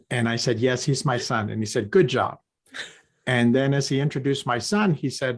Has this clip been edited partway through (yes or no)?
no